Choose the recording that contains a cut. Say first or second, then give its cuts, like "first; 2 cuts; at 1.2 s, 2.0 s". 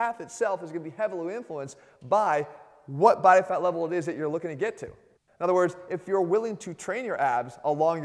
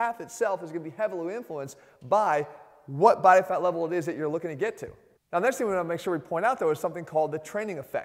first; 1 cut; at 5.3 s